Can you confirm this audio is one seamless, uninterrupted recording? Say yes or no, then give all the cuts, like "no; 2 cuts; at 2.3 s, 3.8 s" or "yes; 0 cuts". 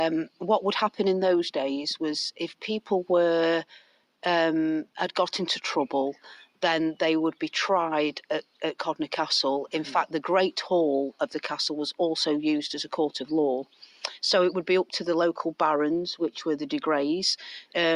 yes; 0 cuts